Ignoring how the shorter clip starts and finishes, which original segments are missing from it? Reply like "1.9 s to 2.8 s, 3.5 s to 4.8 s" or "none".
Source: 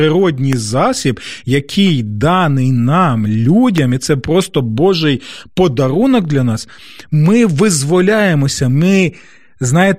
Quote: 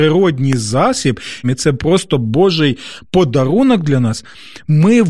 1.4 s to 3.9 s